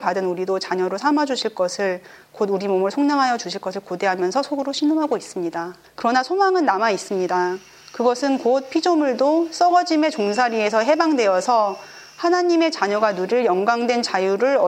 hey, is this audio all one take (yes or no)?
no